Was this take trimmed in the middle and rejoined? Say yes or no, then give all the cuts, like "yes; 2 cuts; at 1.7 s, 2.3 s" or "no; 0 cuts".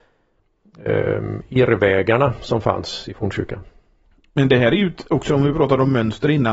no; 0 cuts